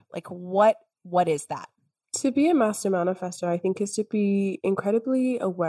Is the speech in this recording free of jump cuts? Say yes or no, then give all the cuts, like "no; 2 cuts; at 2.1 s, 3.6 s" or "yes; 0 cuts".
yes; 0 cuts